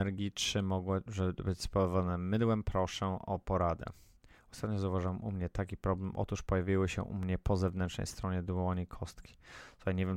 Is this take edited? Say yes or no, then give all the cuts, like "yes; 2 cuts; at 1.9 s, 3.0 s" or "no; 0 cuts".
no; 0 cuts